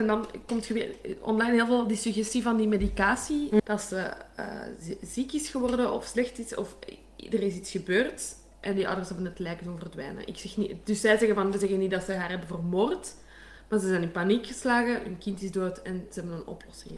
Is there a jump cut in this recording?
yes; 1 cut; at 3.6 s

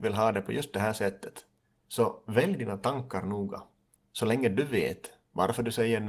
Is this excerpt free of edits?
no; 2 cuts; at 1.7 s, 4.0 s

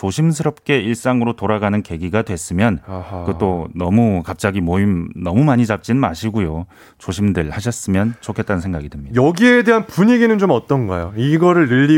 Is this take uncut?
yes; 0 cuts

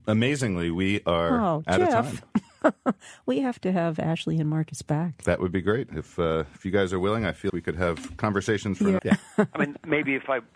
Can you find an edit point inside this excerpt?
yes; 2 cuts; at 7.5 s, 9.0 s

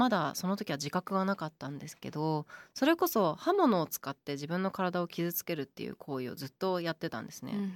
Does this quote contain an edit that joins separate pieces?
no; 0 cuts

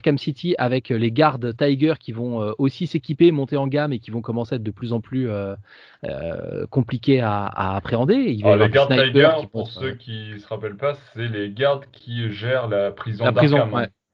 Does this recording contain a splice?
no; 0 cuts

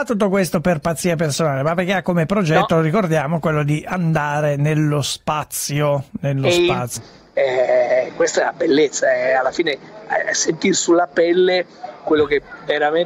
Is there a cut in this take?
yes; 1 cut; at 7.0 s

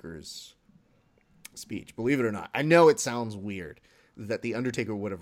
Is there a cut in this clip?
no; 0 cuts

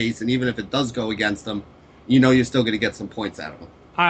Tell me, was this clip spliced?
no; 0 cuts

